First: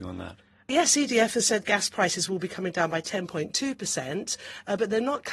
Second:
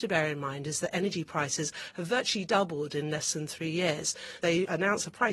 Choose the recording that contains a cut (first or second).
second